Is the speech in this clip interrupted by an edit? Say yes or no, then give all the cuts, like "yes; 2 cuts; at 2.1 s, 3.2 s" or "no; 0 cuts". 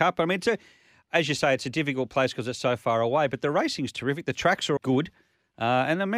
yes; 1 cut; at 4.8 s